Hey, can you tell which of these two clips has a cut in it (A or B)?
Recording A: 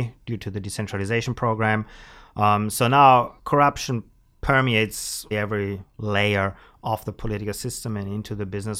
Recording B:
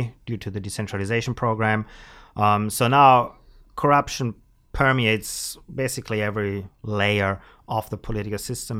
A